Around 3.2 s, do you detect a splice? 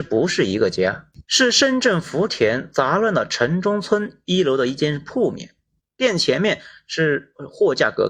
no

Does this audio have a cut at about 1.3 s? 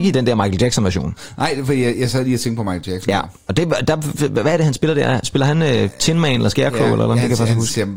no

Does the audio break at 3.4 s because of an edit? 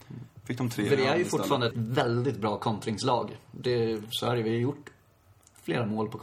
no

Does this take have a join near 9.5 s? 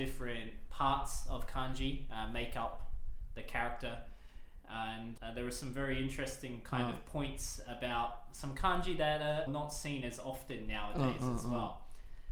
yes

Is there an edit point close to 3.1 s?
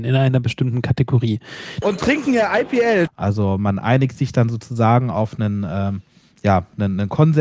yes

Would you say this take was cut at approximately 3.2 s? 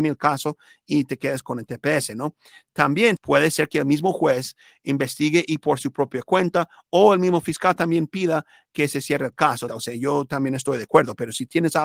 yes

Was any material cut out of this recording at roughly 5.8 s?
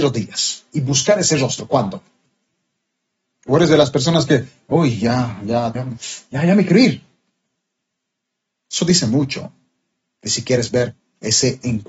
yes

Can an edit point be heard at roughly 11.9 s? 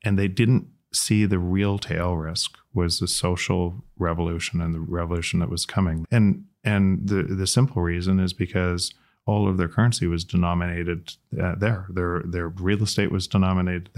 no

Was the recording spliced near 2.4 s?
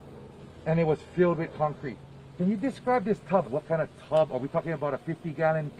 yes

